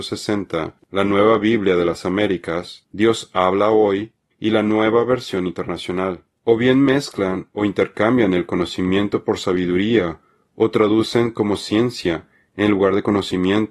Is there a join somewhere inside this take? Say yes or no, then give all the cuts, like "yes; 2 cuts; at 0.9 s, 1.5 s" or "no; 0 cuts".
no; 0 cuts